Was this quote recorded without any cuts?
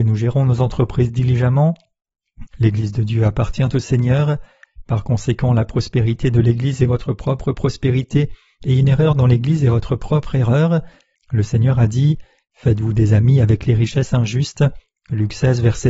no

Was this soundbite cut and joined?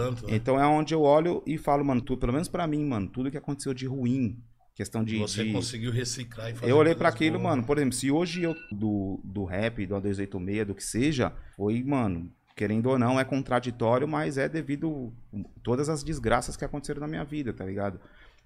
yes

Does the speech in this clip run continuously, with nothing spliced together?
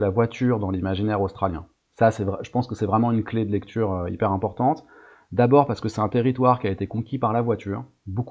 yes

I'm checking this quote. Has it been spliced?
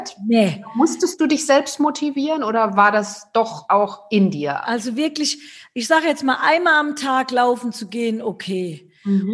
yes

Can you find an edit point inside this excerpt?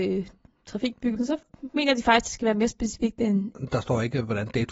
yes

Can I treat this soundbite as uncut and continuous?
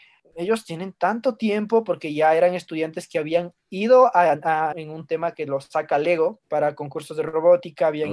no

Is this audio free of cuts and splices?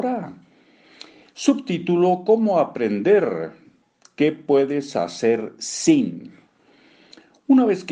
yes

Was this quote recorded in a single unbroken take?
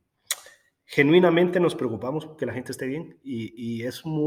yes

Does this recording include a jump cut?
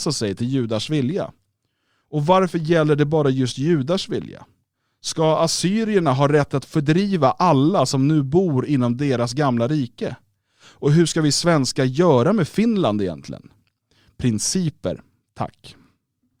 no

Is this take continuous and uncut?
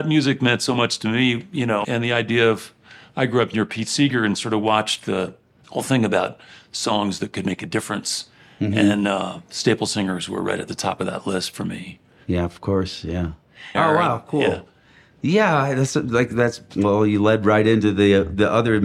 no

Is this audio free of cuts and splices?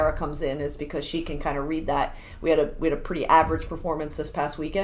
yes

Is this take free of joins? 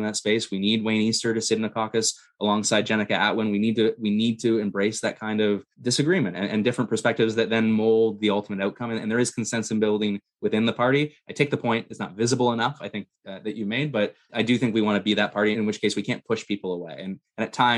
no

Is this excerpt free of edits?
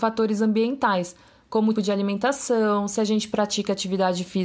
no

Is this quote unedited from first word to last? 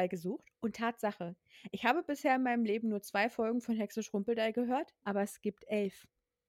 no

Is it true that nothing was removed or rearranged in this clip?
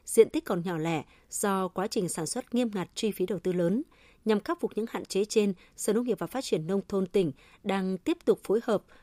yes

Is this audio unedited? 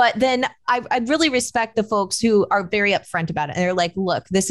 yes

